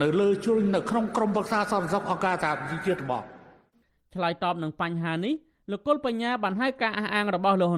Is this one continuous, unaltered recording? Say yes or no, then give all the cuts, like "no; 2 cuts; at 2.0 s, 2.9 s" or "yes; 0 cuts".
yes; 0 cuts